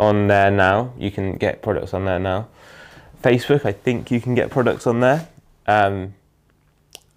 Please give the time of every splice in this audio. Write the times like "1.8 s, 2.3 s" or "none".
none